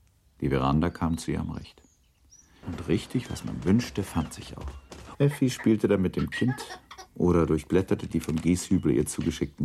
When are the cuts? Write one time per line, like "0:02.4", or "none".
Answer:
0:02.6
0:05.1